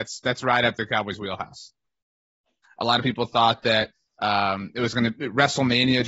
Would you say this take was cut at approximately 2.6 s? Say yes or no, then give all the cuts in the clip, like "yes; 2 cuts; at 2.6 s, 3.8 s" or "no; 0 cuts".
yes; 1 cut; at 2.6 s